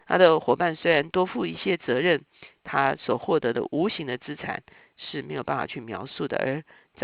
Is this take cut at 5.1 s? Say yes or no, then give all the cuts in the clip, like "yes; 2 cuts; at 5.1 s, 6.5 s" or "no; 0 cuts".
no; 1 cut; at 2.6 s